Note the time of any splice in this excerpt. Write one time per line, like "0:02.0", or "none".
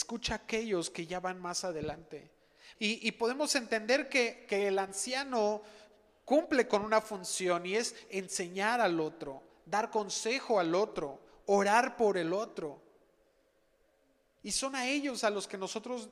0:02.8